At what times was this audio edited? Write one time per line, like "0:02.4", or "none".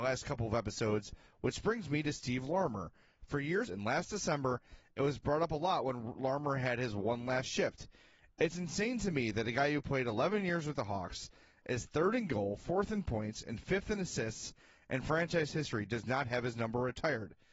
0:03.7